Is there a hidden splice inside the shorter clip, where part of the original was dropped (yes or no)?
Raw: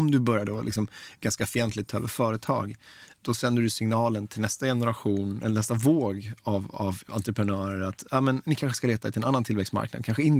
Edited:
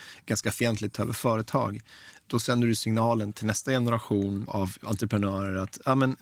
yes